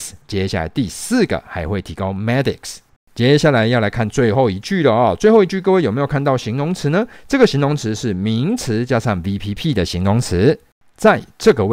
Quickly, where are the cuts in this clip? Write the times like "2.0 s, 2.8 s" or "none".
none